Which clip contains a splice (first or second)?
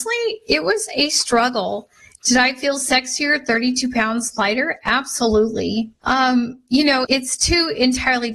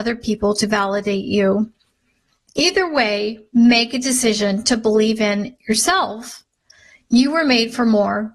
first